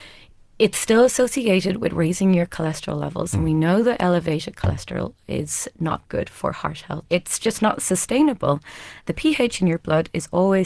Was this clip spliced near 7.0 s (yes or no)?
yes